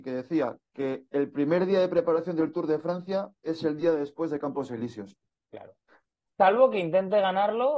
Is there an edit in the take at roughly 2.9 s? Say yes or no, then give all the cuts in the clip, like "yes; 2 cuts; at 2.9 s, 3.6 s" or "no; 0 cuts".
no; 1 cut; at 6.3 s